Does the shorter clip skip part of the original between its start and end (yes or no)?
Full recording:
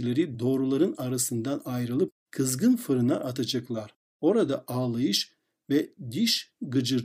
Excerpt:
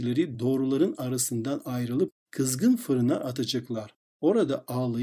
no